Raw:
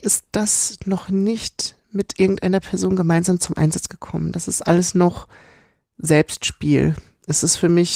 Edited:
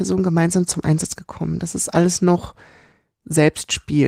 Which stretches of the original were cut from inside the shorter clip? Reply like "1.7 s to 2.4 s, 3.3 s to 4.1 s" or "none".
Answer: none